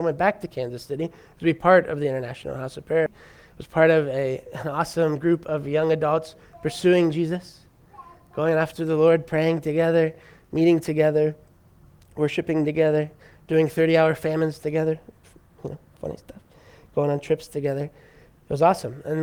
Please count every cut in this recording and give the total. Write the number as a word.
one